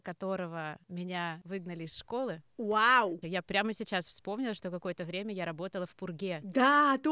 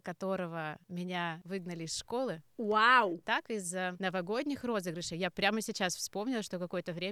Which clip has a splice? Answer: first; 1 cut; at 3.2 s

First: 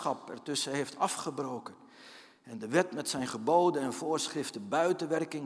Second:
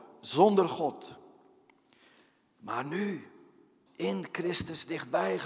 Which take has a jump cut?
second; 1 cut; at 3.9 s

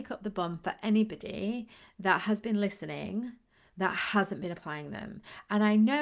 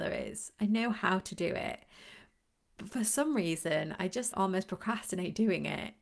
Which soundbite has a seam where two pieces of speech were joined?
second; 1 cut; at 4.3 s

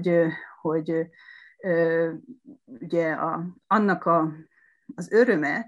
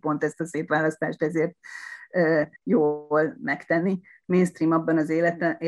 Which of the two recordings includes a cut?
second; 2 cuts; at 2.6 s, 4.2 s

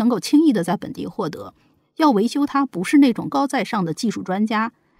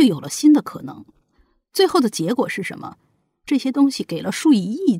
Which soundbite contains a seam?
first; 1 cut; at 3.3 s

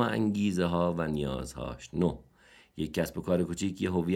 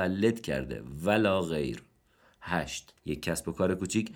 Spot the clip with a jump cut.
second; 1 cut; at 3.0 s

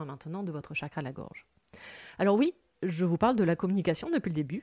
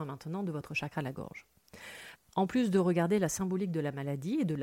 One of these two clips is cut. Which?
second; 1 cut; at 2.1 s

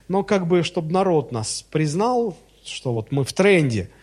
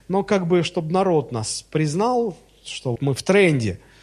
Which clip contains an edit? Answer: second; 1 cut; at 3.0 s

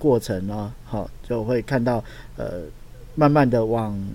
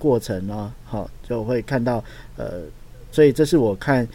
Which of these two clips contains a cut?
second; 1 cut; at 3.1 s

